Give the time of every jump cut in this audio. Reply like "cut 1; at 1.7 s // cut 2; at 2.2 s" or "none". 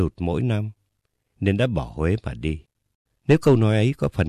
cut 1; at 3.1 s